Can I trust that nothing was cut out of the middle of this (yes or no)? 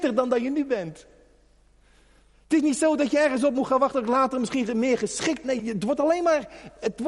no